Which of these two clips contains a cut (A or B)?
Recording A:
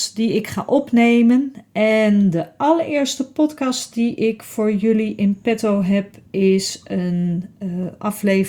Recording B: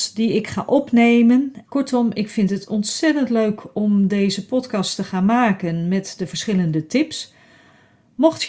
B